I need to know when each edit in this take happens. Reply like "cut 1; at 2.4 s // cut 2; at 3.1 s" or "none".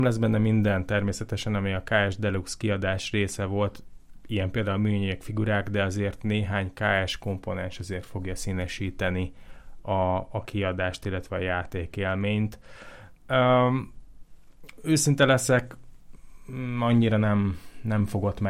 none